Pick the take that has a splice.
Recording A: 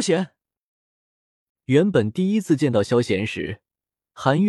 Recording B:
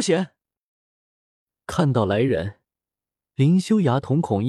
A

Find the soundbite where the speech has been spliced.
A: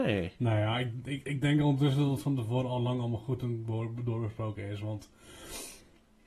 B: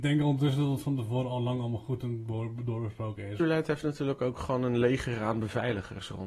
B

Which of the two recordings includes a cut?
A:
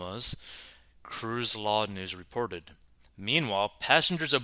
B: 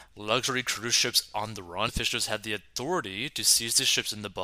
B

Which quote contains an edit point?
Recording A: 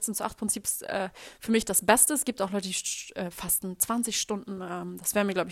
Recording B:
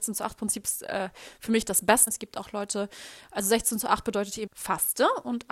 B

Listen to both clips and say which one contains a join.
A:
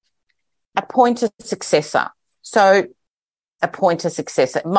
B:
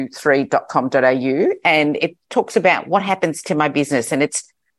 A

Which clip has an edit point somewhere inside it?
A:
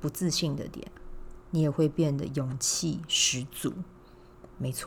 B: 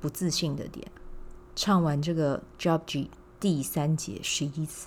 A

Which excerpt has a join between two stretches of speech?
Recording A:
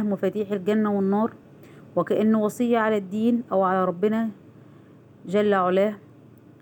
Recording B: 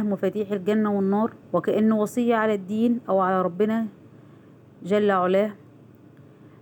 B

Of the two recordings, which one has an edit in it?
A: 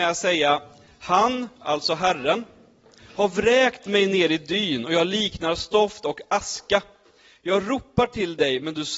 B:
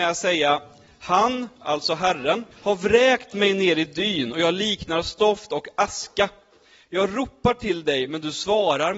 B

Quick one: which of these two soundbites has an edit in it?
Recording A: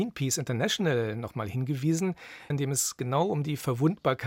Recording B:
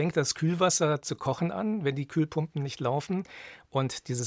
A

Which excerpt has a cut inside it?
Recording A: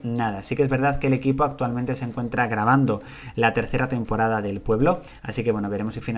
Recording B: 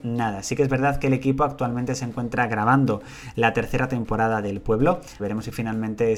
B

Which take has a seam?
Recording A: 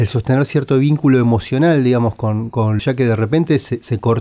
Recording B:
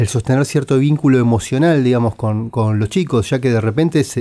A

